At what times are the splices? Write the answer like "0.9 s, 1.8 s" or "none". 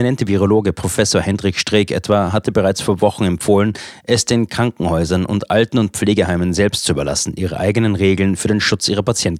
none